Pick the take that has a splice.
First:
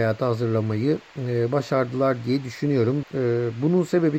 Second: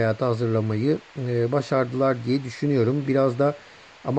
first; 1 cut; at 3.0 s

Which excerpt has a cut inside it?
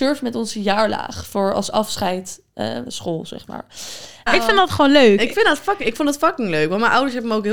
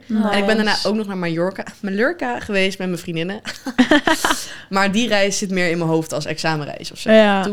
first; 2 cuts; at 2.9 s, 4.3 s

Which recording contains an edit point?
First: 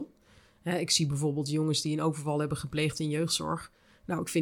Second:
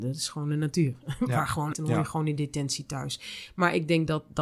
second; 1 cut; at 1.7 s

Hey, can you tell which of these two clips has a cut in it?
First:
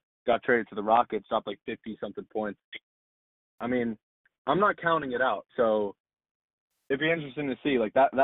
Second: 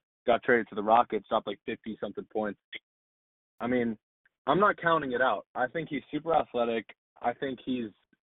first; 1 cut; at 5.5 s

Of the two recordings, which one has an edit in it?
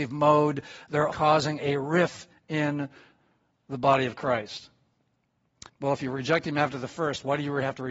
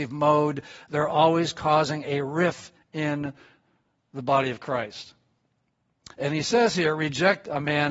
first; 2 cuts; at 1.1 s, 5.7 s

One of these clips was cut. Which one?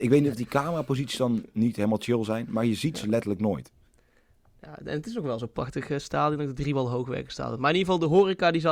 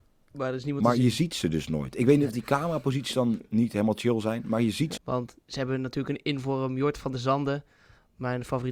second; 1 cut; at 5.0 s

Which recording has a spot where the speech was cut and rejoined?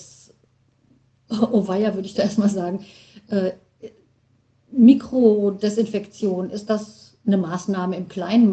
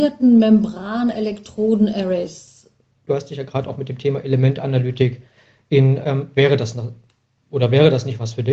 second; 2 cuts; at 3.1 s, 6.0 s

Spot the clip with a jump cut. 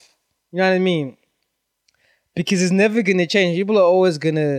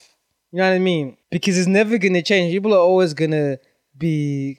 second; 1 cut; at 1.2 s

